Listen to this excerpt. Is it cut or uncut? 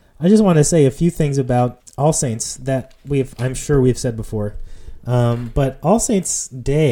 cut